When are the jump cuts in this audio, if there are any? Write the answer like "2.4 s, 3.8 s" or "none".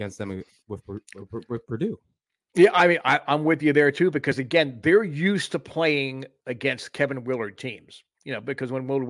none